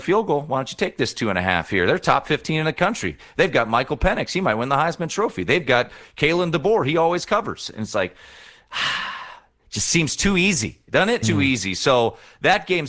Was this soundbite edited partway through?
yes; 1 cut; at 11.2 s

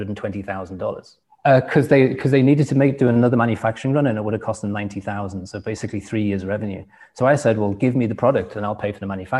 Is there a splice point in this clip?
yes; 1 cut; at 1.2 s

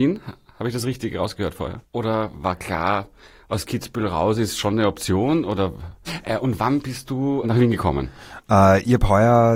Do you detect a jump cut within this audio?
yes; 3 cuts; at 1.8 s, 6.1 s, 7.4 s

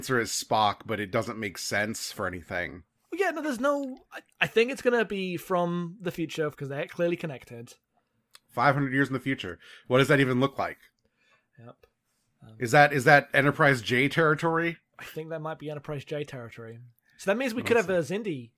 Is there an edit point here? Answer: yes; 1 cut; at 6.5 s

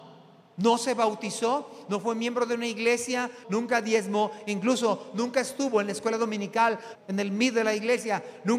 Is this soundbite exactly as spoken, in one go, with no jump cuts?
no; 2 cuts; at 3.4 s, 6.9 s

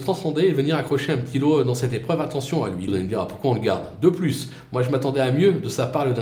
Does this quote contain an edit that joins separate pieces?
yes; 1 cut; at 2.9 s

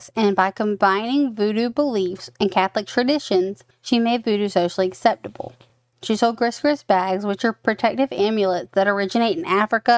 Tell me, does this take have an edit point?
no; 0 cuts

